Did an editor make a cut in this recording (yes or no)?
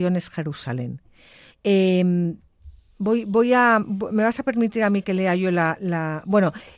yes